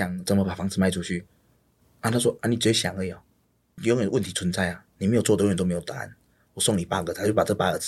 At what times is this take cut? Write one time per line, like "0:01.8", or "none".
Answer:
none